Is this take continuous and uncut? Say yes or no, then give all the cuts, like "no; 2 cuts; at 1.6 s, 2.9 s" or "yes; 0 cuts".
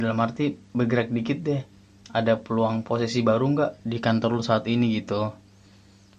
yes; 0 cuts